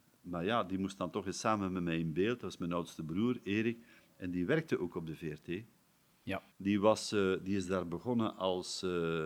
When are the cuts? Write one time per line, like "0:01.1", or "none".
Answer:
0:06.5